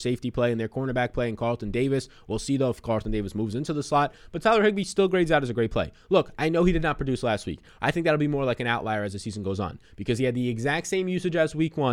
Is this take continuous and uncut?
yes; 0 cuts

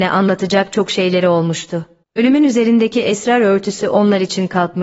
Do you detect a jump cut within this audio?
yes; 1 cut; at 2.0 s

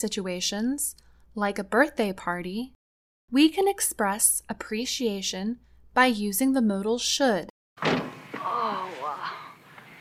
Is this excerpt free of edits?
no; 1 cut; at 7.8 s

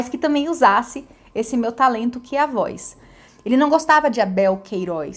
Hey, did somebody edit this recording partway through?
yes; 1 cut; at 3.3 s

